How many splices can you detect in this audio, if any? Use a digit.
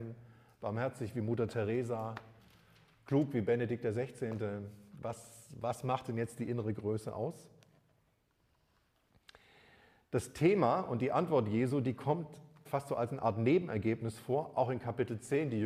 1